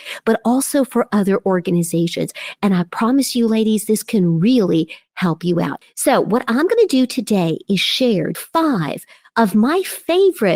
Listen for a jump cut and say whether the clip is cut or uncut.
cut